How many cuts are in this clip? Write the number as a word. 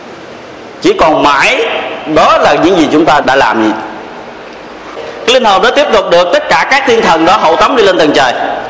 one